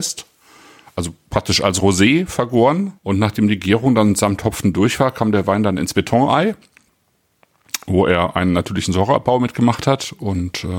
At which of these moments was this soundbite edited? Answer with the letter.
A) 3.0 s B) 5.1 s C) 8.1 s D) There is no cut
A